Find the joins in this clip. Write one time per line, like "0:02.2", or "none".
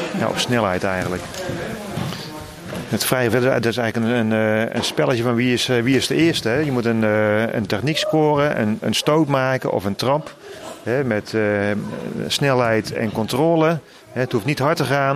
none